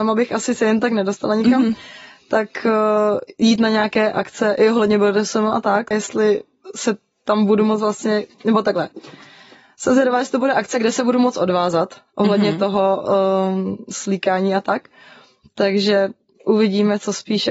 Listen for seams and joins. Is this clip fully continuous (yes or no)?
no